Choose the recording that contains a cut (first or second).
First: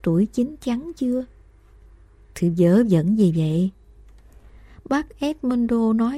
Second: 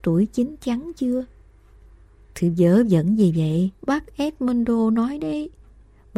second